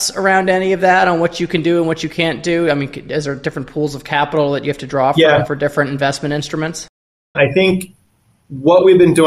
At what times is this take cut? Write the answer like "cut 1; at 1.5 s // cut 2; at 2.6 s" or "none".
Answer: cut 1; at 7.3 s